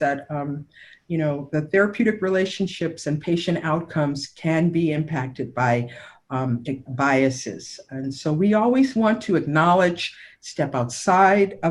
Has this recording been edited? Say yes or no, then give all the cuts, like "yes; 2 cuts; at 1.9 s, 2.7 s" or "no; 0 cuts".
yes; 1 cut; at 6.9 s